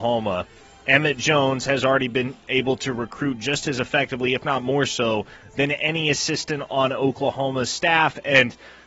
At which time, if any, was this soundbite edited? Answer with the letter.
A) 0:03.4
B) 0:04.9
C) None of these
C